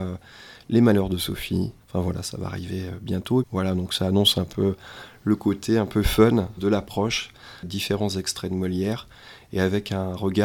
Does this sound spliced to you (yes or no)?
yes